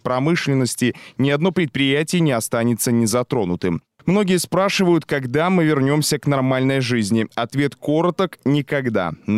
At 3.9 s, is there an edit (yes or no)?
yes